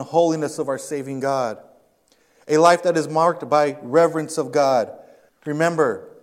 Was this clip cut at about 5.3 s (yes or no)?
yes